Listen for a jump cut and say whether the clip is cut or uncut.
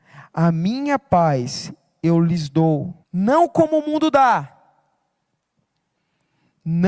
cut